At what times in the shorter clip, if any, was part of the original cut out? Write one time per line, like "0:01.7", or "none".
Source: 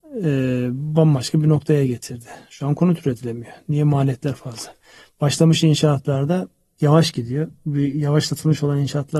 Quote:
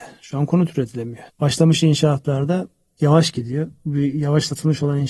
0:01.3